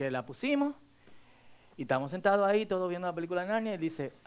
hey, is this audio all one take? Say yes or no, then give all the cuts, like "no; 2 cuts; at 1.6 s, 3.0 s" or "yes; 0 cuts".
yes; 0 cuts